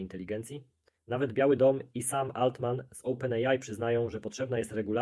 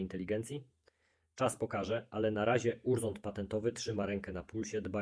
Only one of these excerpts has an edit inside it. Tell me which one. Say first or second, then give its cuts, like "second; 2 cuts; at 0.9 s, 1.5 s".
first; 1 cut; at 1.0 s